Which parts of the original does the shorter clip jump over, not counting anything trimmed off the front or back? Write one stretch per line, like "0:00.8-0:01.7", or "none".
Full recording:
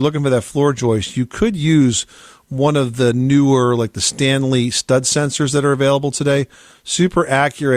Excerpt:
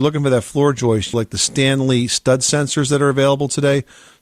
0:01.1-0:03.8